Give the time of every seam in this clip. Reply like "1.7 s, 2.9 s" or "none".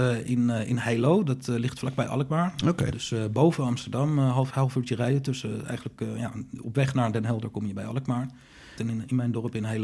4.5 s, 8.8 s